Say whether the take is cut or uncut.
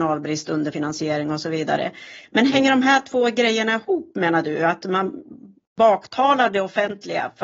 uncut